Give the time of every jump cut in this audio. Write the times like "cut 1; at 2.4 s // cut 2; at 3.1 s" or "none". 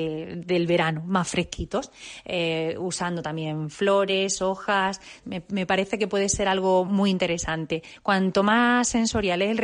cut 1; at 5.2 s